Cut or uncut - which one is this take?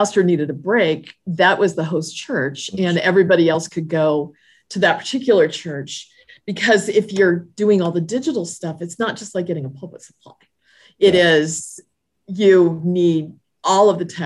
uncut